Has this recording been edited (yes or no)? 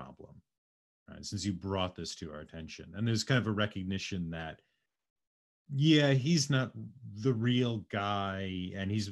no